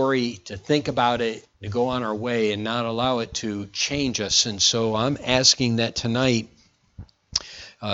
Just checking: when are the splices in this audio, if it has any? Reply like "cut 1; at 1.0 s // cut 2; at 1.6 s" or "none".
cut 1; at 1.5 s